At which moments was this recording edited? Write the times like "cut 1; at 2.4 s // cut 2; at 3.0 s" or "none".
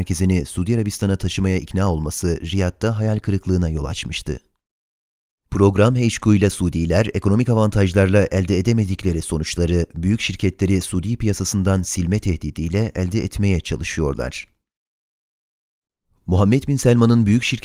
cut 1; at 5.5 s